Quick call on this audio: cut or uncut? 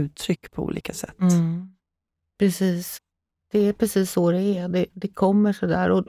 uncut